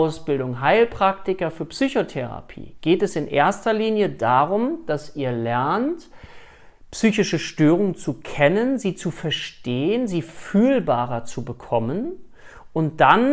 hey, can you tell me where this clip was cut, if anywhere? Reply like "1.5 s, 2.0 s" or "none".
none